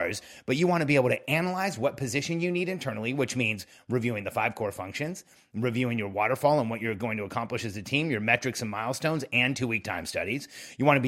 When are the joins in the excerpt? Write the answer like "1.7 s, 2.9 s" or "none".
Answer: none